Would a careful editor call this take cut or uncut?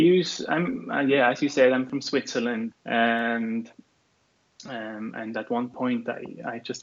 cut